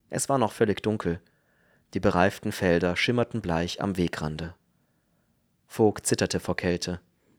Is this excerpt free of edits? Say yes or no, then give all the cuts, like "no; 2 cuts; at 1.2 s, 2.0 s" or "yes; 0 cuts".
yes; 0 cuts